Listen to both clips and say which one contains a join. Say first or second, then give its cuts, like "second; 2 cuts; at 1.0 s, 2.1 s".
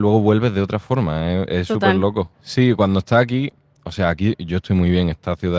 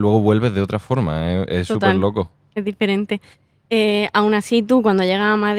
first; 1 cut; at 2.3 s